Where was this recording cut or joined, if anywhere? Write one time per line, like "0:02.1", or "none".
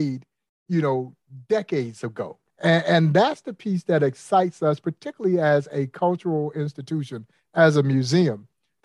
0:02.5